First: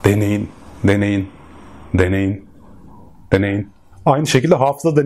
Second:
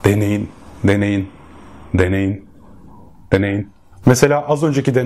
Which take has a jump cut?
second; 1 cut; at 4.0 s

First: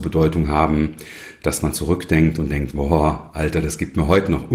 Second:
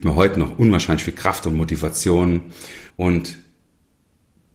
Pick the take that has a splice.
second; 1 cut; at 2.9 s

